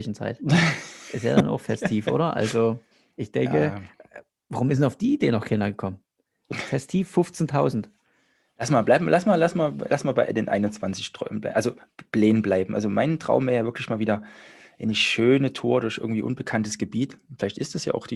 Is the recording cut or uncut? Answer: uncut